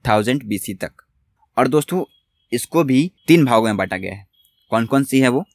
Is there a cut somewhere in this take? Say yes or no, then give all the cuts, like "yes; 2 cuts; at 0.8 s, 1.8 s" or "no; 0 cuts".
yes; 1 cut; at 3.2 s